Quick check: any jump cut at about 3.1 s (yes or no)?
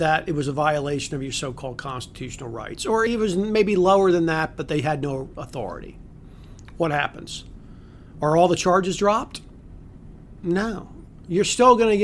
no